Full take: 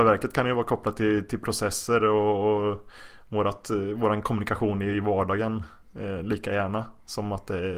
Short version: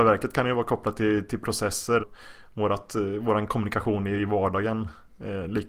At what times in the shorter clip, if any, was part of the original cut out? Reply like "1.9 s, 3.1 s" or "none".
2.0 s